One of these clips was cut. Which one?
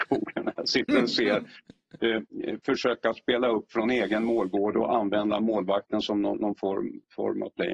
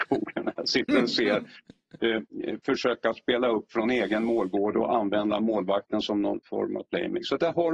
second; 1 cut; at 6.4 s

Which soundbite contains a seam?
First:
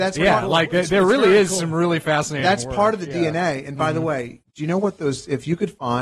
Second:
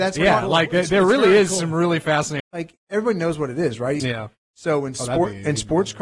second; 2 cuts; at 2.4 s, 4.0 s

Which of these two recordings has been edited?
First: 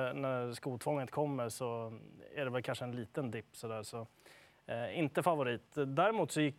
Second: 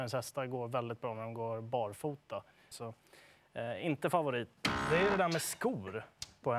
second; 2 cuts; at 2.7 s, 4.6 s

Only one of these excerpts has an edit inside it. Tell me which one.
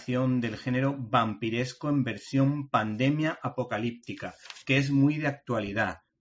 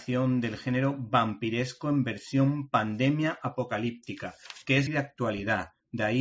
second; 1 cut; at 4.9 s

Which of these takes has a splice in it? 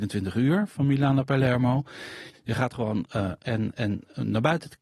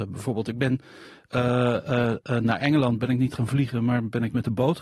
first; 2 cuts; at 2.3 s, 3.4 s

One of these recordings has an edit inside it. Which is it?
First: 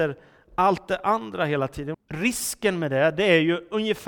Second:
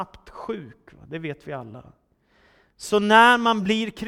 first; 1 cut; at 1.9 s

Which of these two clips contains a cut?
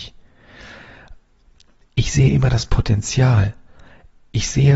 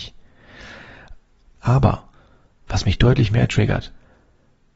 second; 1 cut; at 1.6 s

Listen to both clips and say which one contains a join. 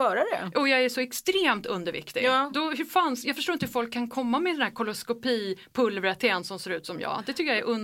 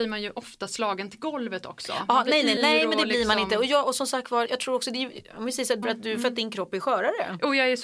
second; 3 cuts; at 2.6 s, 4.5 s, 5.8 s

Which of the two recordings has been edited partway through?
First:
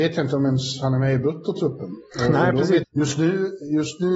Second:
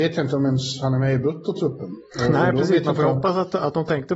first; 1 cut; at 2.8 s

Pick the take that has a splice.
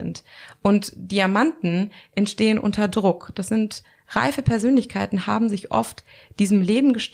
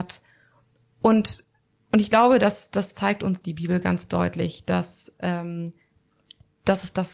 first; 1 cut; at 3.3 s

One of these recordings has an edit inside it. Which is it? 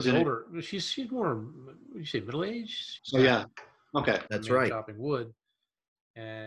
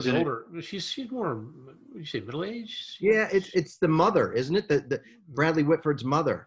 first; 2 cuts; at 3.0 s, 4.3 s

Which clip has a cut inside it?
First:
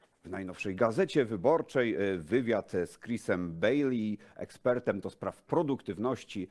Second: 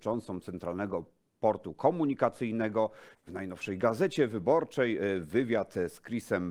second; 1 cut; at 3.1 s

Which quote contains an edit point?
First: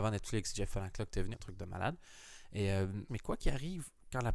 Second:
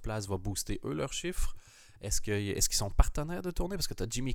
first; 2 cuts; at 1.3 s, 3.1 s

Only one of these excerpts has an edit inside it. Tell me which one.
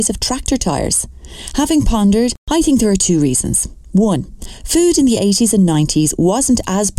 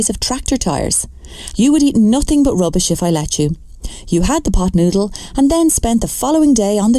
second; 1 cut; at 1.5 s

